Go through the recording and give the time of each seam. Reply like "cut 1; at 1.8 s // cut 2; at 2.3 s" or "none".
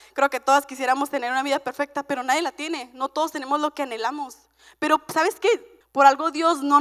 cut 1; at 5.8 s